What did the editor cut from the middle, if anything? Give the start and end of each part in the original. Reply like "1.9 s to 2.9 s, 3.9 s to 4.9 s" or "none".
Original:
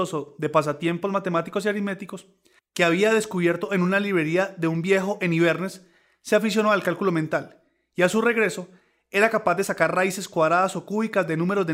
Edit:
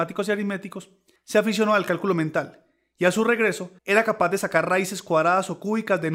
2.5 s to 6.1 s, 8.8 s to 9.0 s